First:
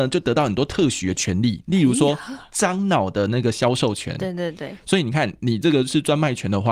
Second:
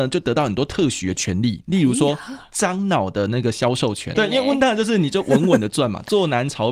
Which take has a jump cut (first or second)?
second